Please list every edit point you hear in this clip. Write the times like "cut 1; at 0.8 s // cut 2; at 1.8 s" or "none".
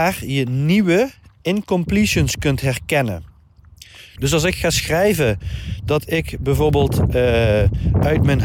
cut 1; at 4.2 s